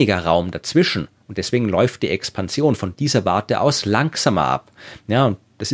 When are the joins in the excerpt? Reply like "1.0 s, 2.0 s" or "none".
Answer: none